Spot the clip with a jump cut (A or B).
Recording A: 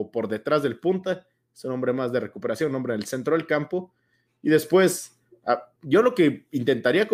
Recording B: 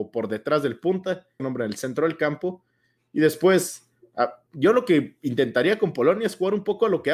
B